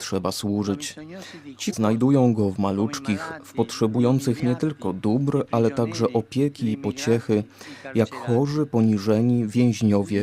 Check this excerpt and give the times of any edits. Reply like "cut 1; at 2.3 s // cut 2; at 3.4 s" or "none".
cut 1; at 1.7 s